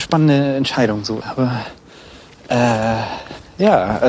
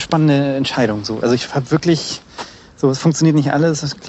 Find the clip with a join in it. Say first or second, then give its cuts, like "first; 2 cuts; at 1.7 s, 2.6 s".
first; 1 cut; at 1.2 s